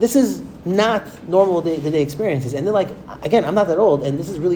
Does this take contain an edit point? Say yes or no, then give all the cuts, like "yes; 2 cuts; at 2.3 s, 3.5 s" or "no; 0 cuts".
no; 0 cuts